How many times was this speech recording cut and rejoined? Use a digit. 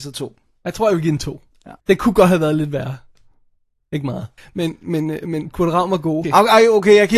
3